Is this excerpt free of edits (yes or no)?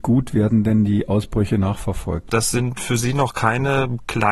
no